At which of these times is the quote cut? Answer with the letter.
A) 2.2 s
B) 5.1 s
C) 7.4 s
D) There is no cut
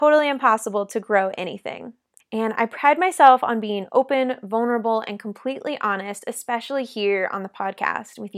A